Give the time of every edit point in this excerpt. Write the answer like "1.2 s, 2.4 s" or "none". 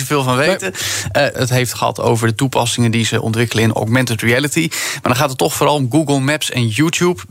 1.3 s